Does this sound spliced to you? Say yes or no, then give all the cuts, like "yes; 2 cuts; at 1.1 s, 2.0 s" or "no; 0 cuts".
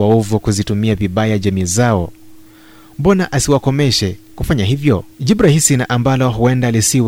yes; 1 cut; at 5.1 s